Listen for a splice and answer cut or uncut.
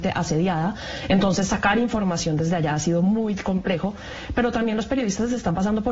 uncut